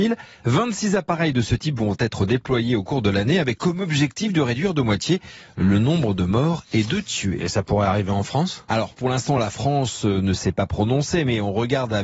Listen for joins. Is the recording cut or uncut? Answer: uncut